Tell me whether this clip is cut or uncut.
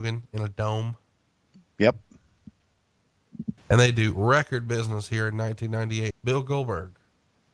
cut